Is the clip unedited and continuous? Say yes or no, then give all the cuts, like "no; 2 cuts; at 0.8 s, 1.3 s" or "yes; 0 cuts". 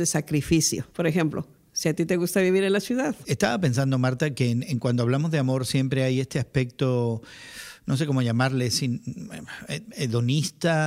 no; 1 cut; at 3.2 s